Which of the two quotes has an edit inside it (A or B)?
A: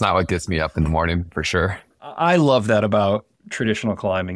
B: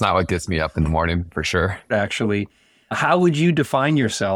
B